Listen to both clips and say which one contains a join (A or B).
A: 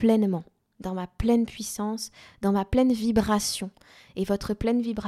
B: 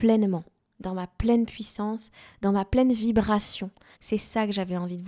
B